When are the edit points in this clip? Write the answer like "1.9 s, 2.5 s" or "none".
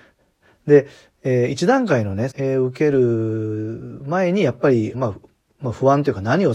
2.3 s, 4.9 s